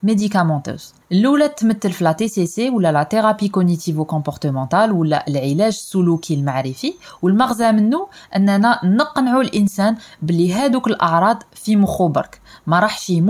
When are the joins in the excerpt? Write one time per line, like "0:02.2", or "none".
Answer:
0:01.0